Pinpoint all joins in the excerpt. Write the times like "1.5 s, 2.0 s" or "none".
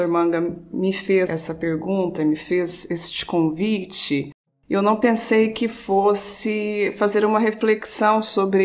1.3 s